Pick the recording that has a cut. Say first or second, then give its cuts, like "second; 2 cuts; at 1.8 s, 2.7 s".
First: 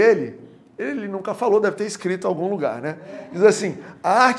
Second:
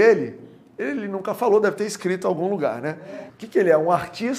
second; 1 cut; at 3.3 s